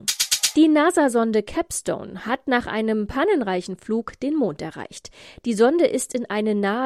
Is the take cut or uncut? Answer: uncut